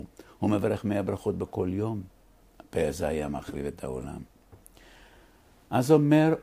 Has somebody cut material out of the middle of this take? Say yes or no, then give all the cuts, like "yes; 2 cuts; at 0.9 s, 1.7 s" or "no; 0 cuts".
yes; 1 cut; at 2.4 s